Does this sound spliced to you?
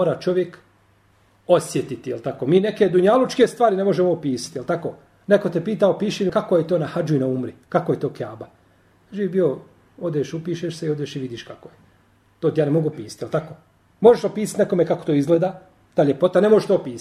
yes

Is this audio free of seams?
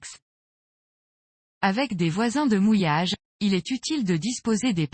yes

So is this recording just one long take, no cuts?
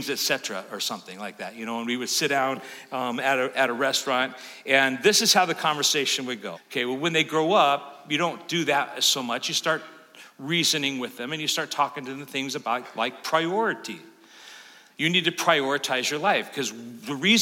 no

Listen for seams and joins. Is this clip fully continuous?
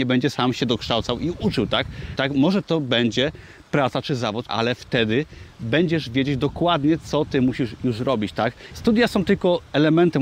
no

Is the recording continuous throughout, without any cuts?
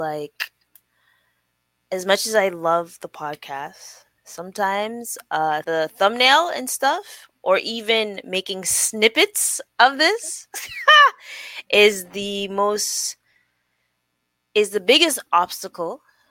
no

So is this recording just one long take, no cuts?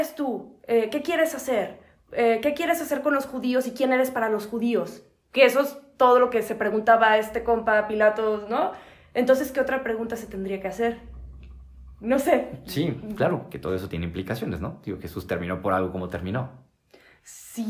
no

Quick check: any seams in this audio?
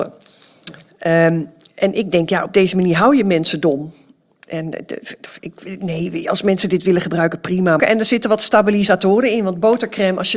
yes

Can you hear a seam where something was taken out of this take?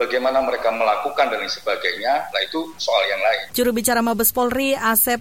yes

